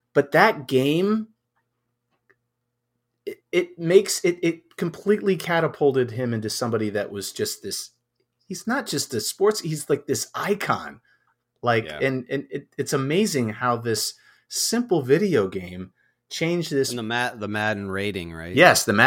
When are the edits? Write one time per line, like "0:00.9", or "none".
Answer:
0:03.4